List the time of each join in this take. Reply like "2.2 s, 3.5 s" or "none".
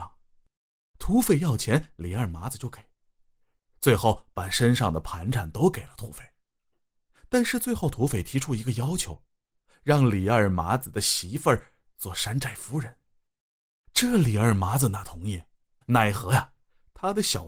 15.8 s